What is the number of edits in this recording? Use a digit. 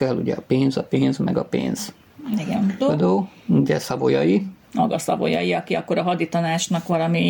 2